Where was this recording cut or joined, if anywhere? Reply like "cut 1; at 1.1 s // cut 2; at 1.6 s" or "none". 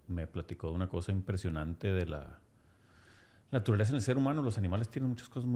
none